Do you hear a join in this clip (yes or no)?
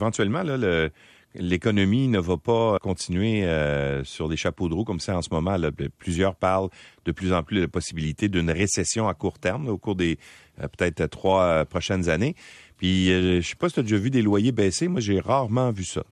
yes